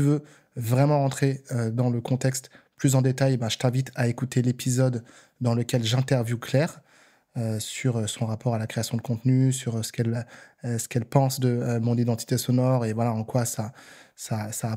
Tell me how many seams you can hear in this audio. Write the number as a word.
zero